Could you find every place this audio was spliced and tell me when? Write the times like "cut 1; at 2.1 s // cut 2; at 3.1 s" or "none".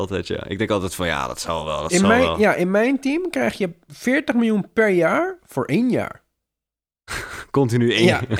none